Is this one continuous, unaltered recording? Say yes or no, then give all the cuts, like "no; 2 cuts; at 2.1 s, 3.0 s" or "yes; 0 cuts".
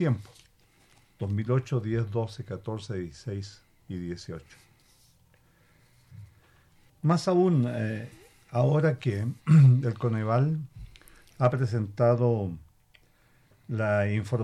no; 1 cut; at 6.9 s